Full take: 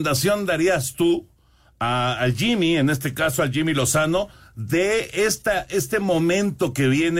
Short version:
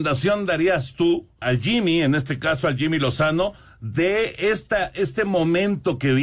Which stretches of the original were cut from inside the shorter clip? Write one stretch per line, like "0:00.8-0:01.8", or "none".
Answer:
0:01.4-0:02.2